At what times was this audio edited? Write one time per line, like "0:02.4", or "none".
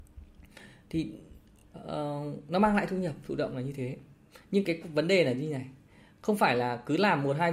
none